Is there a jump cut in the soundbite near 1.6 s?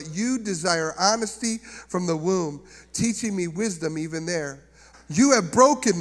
no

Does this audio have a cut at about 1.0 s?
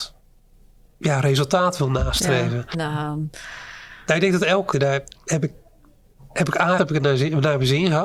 no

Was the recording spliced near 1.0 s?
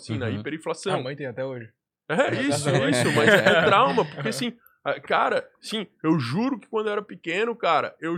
no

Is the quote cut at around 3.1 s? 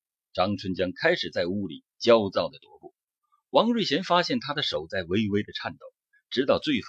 no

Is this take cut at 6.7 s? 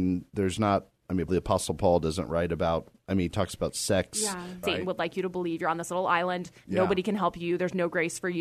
no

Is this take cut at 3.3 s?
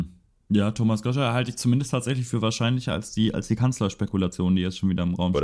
no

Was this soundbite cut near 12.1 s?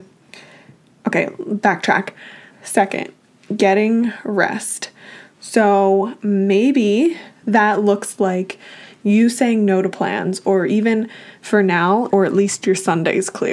yes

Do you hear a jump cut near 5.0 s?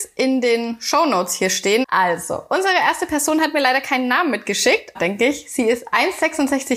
yes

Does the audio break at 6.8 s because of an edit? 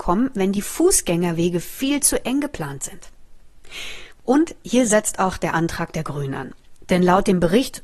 no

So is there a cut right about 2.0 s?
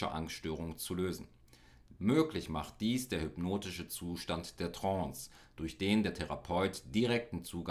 yes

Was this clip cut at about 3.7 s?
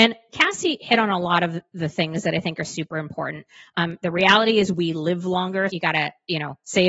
no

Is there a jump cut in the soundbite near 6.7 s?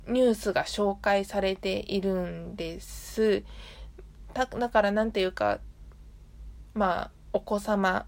yes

